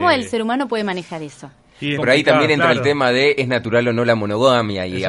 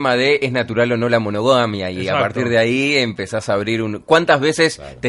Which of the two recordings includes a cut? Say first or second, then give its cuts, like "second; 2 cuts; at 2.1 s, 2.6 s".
first; 1 cut; at 2.0 s